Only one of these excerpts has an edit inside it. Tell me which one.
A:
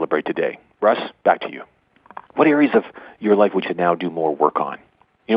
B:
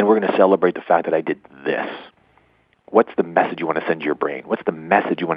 A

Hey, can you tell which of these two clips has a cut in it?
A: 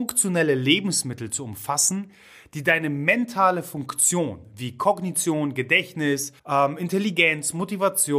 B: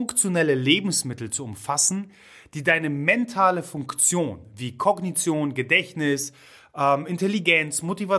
A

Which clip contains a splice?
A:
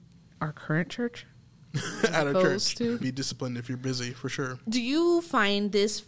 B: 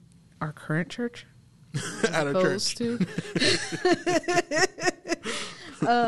A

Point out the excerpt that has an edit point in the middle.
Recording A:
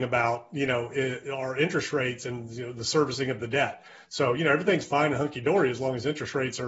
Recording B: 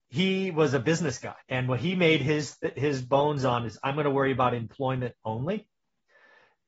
B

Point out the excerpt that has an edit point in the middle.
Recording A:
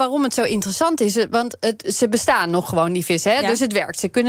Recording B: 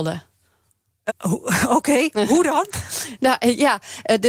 B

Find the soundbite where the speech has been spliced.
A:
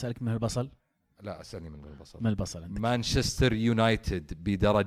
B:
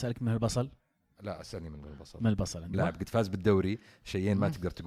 B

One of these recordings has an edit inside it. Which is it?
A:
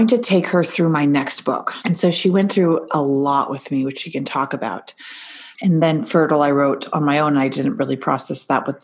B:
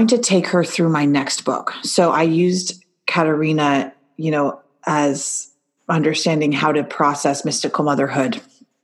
A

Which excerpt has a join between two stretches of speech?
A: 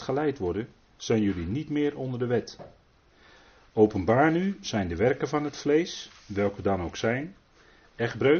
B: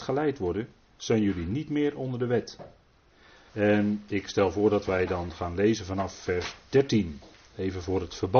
B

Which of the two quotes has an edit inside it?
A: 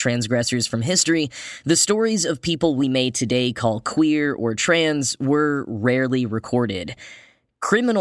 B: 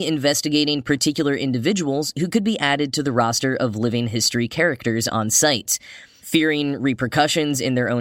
B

